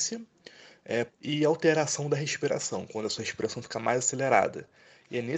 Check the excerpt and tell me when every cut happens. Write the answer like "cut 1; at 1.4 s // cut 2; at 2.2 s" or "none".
cut 1; at 1.1 s